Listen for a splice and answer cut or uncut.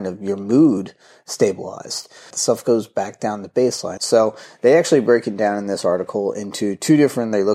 cut